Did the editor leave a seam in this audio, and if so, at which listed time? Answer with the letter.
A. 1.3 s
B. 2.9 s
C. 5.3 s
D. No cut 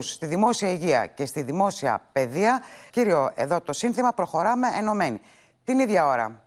B